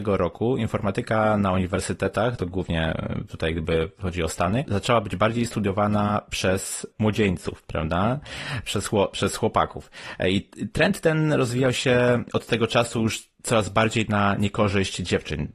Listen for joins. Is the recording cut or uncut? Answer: uncut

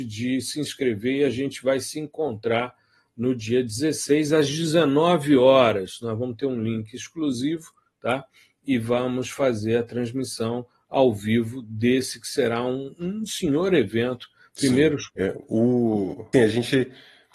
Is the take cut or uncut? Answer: cut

